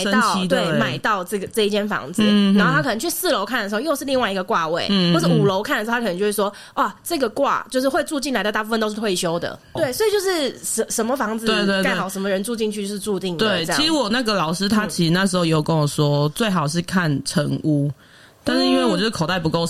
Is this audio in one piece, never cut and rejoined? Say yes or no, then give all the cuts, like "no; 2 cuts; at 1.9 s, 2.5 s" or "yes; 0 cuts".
no; 1 cut; at 9.8 s